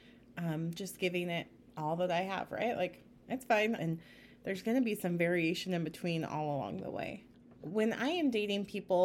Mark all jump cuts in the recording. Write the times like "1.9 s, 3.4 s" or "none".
3.8 s

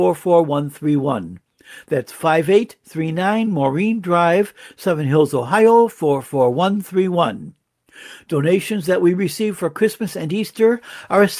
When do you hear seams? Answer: none

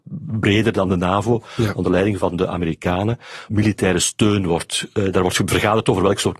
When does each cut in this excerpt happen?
3.5 s, 4.9 s

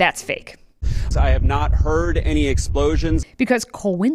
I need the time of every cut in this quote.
1.1 s, 3.2 s

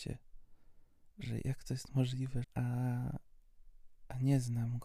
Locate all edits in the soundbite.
2.4 s

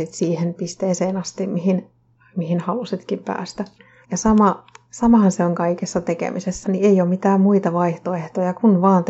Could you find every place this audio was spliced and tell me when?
4.0 s, 6.6 s

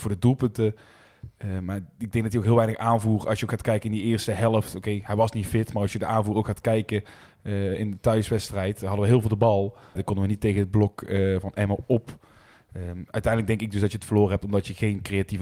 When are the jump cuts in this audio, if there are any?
10.0 s

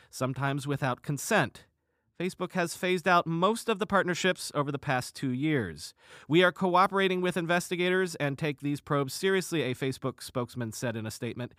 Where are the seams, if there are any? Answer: none

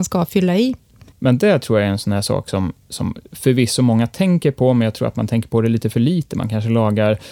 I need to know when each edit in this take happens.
1.1 s

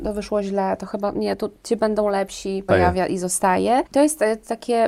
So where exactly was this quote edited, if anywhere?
2.7 s, 3.9 s

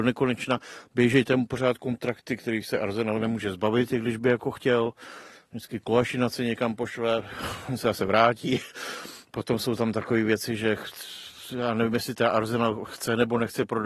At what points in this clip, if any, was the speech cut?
none

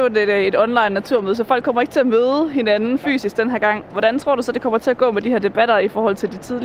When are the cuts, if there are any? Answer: none

